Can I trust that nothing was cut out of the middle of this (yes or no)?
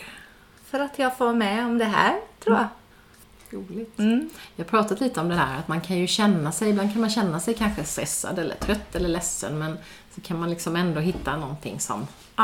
yes